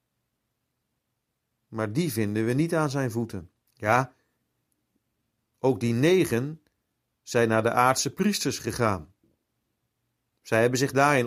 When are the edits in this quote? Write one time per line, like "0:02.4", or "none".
0:03.6